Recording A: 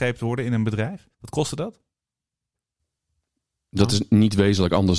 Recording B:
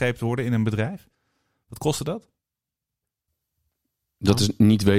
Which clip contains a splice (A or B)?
A